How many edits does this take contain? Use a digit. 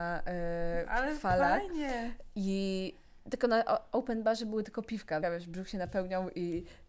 1